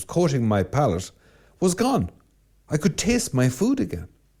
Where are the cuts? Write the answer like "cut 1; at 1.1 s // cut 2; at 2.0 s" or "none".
cut 1; at 2.5 s